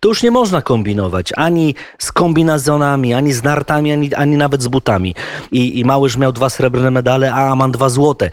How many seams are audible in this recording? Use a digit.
1